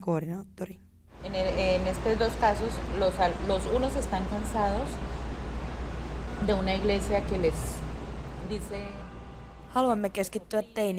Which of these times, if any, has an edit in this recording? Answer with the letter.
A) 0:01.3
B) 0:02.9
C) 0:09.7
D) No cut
D